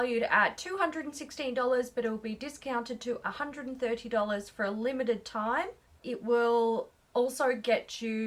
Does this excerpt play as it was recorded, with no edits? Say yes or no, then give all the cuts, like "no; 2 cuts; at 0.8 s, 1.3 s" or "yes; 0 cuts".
no; 1 cut; at 5.9 s